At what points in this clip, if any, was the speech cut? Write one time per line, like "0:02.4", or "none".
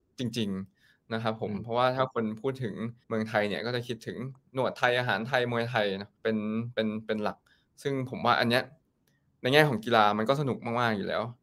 0:03.0
0:06.2